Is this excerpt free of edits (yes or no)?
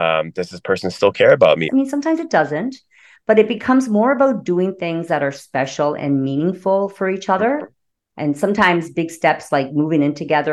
no